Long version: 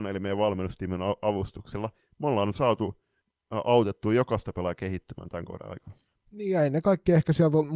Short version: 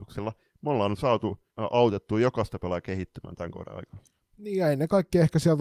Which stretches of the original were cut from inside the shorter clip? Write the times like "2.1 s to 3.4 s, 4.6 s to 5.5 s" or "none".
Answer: 3.1 s to 3.4 s